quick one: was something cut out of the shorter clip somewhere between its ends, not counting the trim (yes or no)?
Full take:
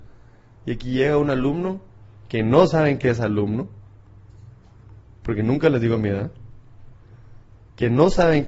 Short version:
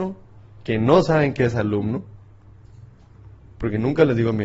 no